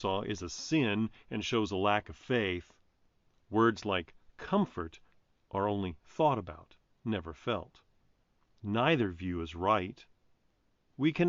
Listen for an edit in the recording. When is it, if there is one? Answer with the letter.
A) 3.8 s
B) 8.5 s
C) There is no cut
C